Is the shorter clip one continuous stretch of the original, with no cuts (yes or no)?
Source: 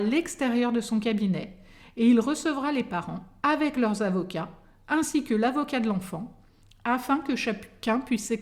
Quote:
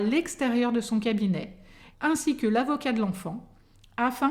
no